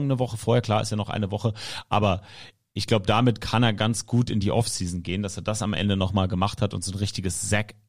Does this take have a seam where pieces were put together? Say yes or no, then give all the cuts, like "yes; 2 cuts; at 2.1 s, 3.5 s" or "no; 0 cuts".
no; 0 cuts